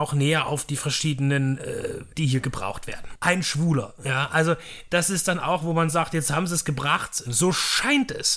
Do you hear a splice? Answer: yes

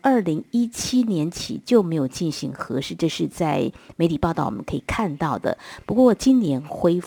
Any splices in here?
no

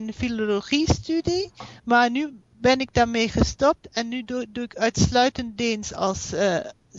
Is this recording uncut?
no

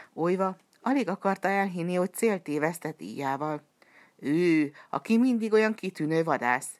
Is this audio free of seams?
yes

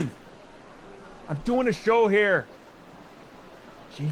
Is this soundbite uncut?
yes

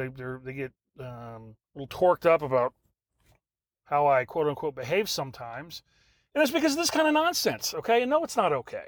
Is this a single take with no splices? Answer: no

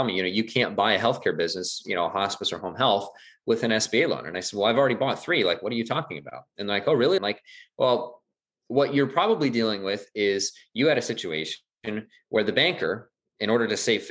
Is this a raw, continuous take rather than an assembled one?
no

